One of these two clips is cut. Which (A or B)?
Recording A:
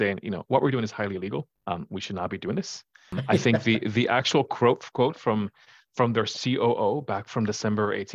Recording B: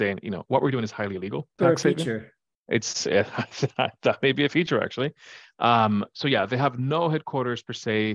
B